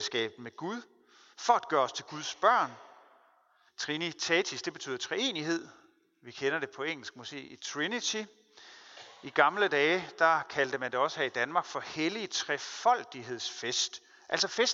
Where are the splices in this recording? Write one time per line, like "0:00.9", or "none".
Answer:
0:03.7